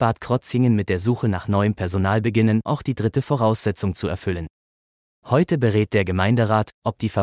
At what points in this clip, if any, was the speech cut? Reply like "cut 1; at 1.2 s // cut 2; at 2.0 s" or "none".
cut 1; at 2.7 s // cut 2; at 5.1 s